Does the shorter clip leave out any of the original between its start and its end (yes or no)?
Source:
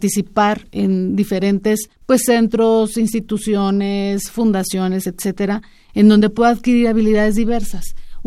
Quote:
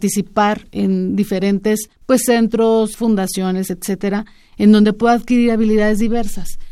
yes